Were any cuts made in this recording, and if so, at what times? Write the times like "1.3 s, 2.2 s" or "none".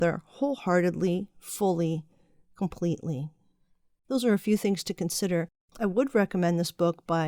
4.0 s